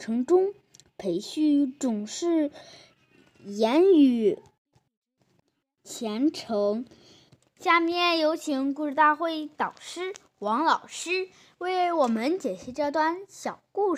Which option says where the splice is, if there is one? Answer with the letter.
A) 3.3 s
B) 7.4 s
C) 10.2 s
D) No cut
B